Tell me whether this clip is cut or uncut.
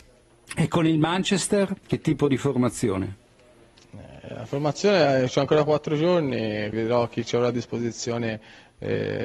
cut